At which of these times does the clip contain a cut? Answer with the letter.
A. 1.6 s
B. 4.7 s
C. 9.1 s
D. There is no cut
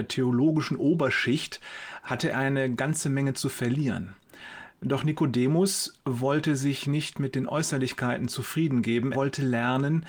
C